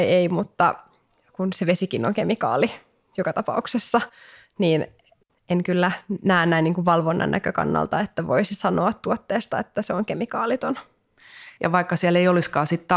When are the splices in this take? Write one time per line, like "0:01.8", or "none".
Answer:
0:11.6